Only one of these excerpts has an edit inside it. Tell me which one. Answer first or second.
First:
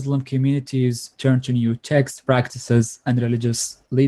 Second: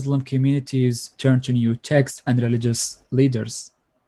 second